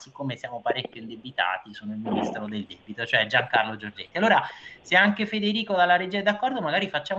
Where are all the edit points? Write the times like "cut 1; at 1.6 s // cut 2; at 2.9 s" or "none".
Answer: none